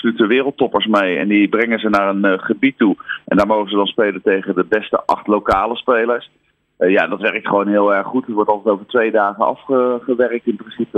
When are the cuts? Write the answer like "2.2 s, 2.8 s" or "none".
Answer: none